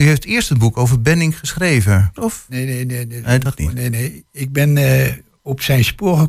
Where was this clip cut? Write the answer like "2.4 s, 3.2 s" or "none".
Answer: 2.2 s